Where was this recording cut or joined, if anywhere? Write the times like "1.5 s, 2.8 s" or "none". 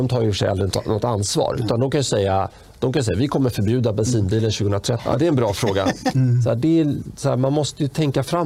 5.0 s, 6.1 s